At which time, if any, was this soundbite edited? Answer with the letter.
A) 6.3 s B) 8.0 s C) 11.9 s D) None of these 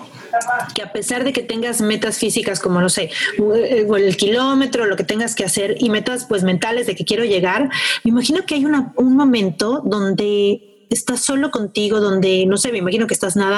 D